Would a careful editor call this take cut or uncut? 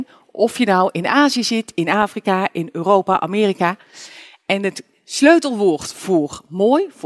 uncut